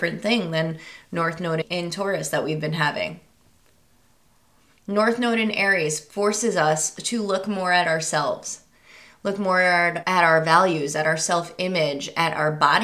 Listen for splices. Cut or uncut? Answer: uncut